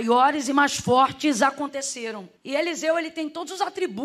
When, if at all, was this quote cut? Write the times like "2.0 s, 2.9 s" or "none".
2.4 s